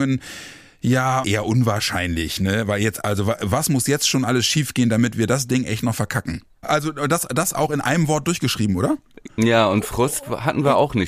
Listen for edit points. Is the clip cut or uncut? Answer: cut